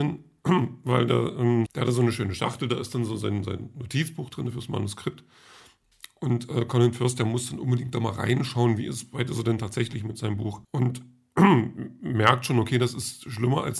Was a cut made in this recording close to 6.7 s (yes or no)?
no